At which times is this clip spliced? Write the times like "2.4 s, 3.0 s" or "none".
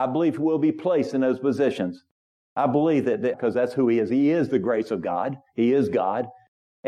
3.3 s

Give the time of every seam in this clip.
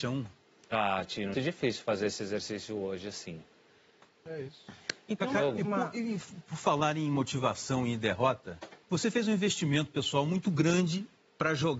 1.3 s, 4.3 s, 8.8 s

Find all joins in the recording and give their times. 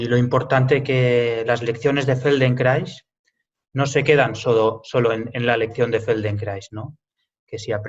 none

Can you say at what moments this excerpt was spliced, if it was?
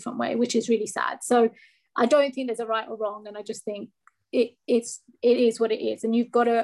none

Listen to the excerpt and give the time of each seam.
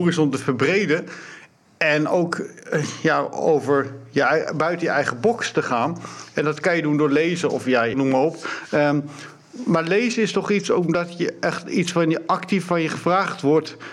7.9 s

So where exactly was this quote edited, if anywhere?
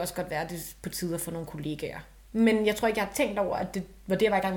2.2 s

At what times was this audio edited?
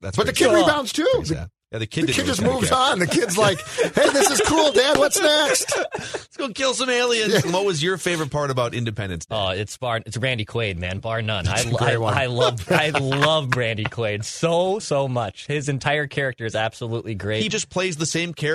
7.4 s, 14.8 s, 17.5 s

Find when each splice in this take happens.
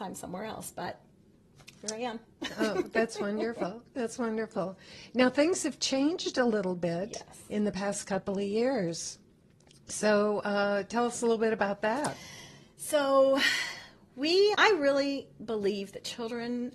14.5 s

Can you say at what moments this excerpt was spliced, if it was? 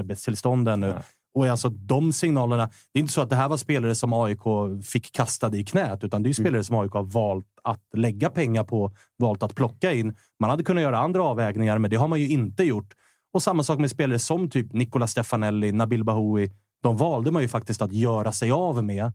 none

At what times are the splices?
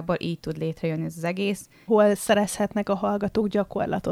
1.9 s

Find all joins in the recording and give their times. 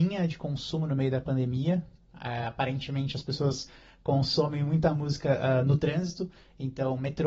none

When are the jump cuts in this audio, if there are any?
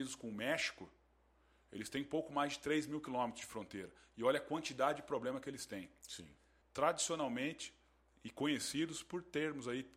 6.6 s

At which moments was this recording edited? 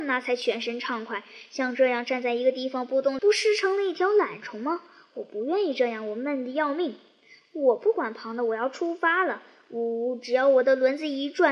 3.2 s

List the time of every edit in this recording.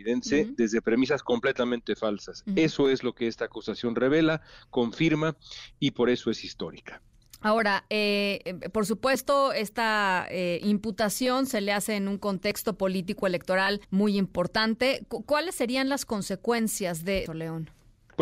13.8 s, 17.3 s

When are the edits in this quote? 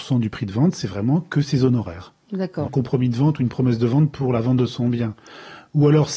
2.6 s

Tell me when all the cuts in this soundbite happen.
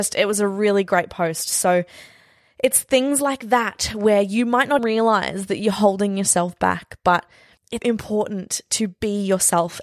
4.8 s, 7.8 s

